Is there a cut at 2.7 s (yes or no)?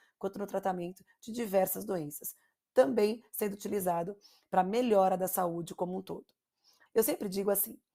no